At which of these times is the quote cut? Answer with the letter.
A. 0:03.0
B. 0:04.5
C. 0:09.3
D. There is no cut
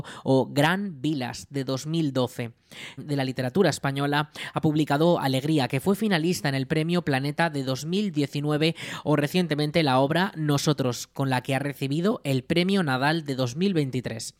A